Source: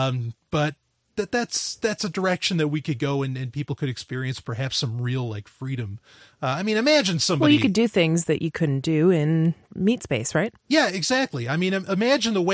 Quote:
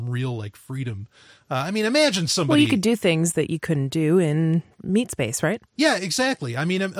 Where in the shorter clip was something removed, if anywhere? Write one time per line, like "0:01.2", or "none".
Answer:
none